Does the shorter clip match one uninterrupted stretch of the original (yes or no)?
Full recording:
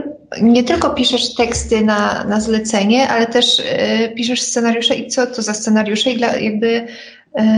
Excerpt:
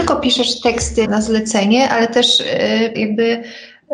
no